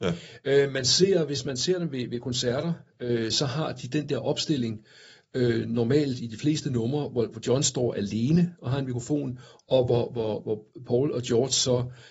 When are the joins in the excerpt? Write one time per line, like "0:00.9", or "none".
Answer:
none

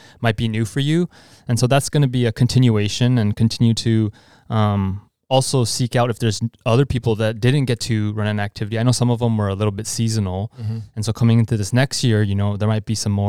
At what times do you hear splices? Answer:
none

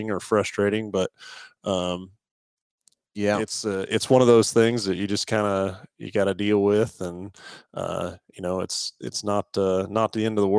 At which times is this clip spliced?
none

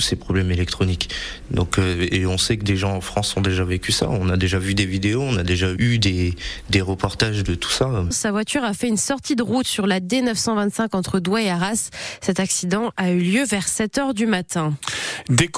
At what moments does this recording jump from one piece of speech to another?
0:08.1

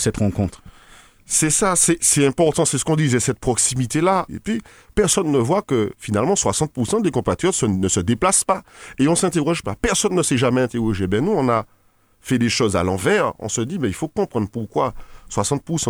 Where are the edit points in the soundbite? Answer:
0:04.3

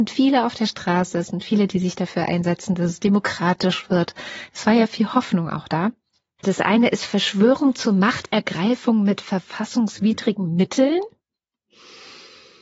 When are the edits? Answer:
0:06.4

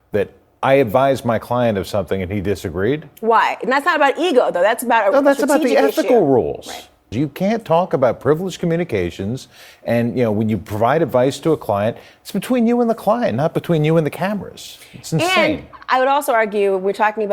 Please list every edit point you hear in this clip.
0:07.1

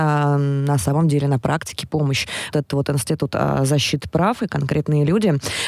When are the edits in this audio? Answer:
0:02.5

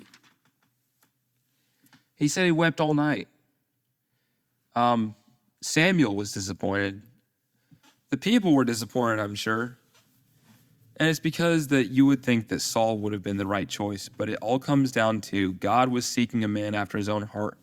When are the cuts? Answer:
none

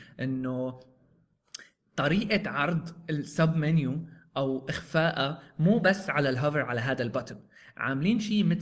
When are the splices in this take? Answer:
none

